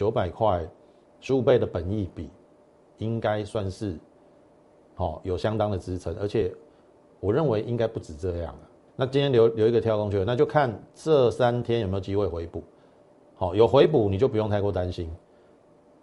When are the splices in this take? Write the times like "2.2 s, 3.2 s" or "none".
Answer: 8.9 s